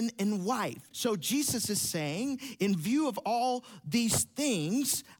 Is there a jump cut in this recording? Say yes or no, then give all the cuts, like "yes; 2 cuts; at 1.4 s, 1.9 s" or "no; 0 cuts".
yes; 1 cut; at 0.9 s